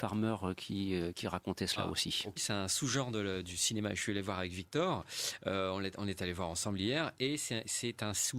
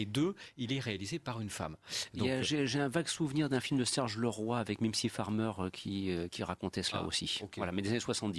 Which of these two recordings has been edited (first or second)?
first